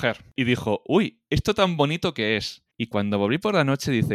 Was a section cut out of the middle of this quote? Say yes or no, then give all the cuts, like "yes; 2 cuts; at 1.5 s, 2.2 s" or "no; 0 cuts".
yes; 1 cut; at 2.7 s